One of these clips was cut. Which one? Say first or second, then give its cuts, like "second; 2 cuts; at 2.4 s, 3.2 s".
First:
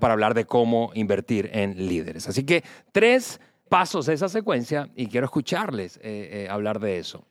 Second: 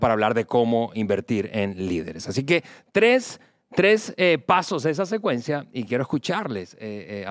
first; 1 cut; at 3.7 s